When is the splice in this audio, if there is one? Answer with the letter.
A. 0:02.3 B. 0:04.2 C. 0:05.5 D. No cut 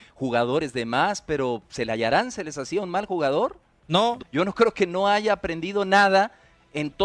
B